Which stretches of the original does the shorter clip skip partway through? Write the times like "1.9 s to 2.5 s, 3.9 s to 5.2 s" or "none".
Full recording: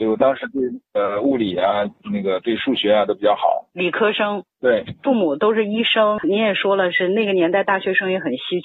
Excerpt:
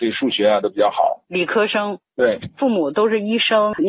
none